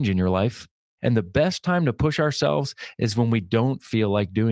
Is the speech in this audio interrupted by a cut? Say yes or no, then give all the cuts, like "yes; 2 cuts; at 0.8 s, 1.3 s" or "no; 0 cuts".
yes; 1 cut; at 1.0 s